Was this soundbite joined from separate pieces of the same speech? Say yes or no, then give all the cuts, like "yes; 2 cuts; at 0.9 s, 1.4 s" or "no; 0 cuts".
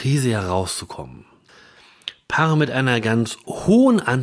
no; 0 cuts